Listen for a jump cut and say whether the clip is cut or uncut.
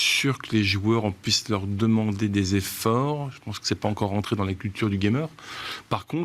uncut